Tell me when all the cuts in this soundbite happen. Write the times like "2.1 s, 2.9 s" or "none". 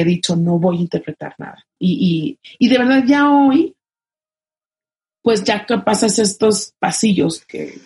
1.8 s